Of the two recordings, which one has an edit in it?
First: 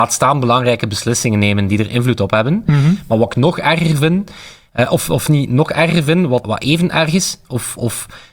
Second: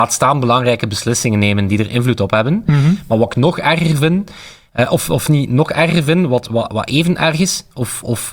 first; 1 cut; at 6.4 s

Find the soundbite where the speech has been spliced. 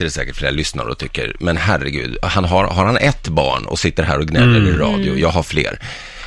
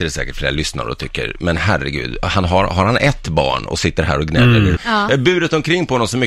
second; 1 cut; at 4.8 s

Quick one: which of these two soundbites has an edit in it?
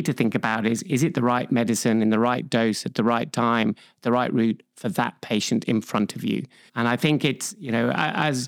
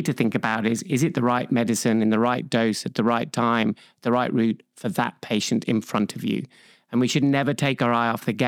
first; 1 cut; at 6.7 s

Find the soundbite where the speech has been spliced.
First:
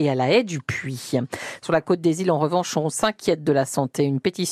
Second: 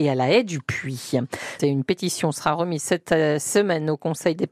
second; 1 cut; at 1.6 s

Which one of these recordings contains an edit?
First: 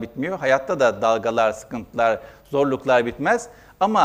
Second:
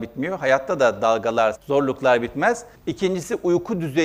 second; 2 cuts; at 1.5 s, 2.7 s

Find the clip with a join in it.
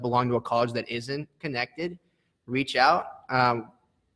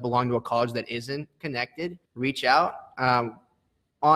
second; 1 cut; at 2.1 s

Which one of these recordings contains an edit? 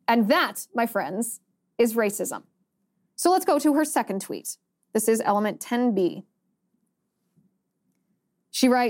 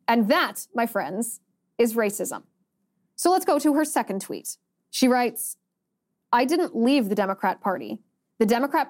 second; 1 cut; at 4.8 s

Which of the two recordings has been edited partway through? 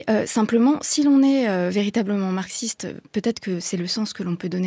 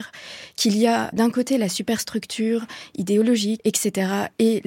second; 2 cuts; at 1.1 s, 3.6 s

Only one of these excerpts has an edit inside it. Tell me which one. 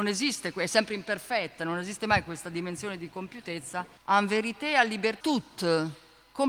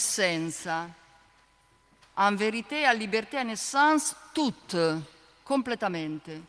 first; 2 cuts; at 4.0 s, 5.2 s

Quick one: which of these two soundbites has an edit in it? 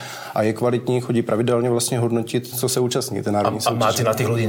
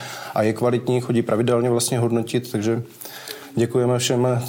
first; 1 cut; at 2.5 s

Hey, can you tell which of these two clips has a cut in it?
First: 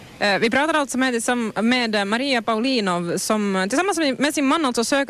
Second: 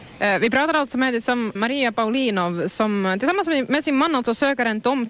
second; 1 cut; at 1.6 s

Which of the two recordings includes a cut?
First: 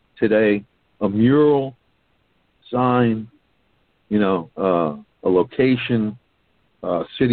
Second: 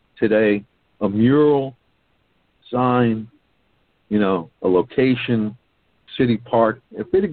second; 2 cuts; at 4.5 s, 6.1 s

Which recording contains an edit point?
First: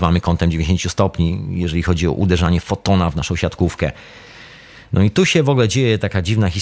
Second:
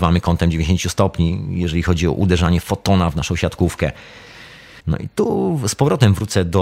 second; 1 cut; at 4.8 s

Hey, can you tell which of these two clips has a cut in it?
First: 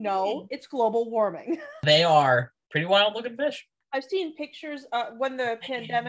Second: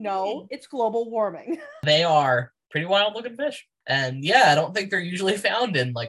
first; 1 cut; at 3.8 s

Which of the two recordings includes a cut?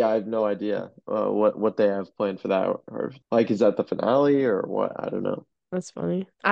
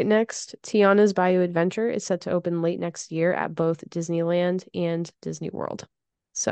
first; 1 cut; at 3.2 s

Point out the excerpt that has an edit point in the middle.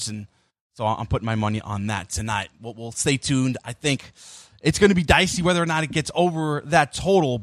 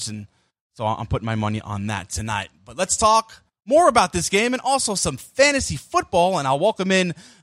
first; 1 cut; at 2.6 s

